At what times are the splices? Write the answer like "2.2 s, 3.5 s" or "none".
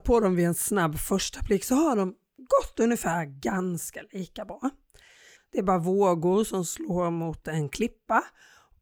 5.4 s

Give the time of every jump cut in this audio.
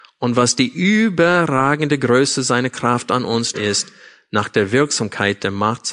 3.5 s

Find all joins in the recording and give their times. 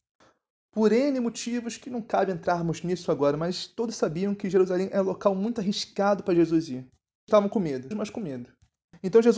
7.9 s

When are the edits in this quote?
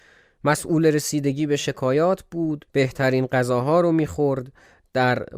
2.7 s

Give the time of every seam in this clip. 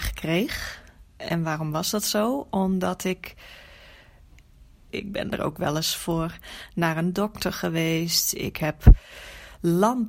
4.9 s

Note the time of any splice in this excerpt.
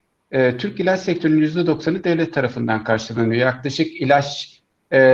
none

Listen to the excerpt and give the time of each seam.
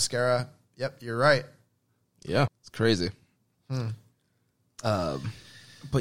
2.5 s

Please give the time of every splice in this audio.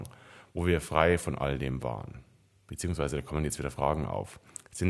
2.6 s

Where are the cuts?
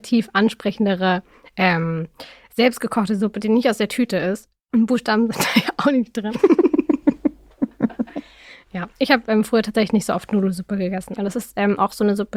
11.2 s

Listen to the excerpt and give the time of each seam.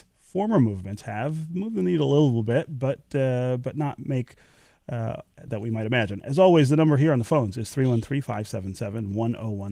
5.5 s

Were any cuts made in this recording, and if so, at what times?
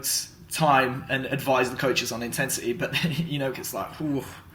3.5 s

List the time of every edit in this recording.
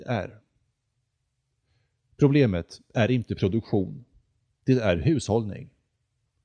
none

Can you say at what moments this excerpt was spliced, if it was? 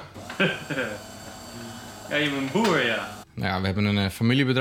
3.2 s

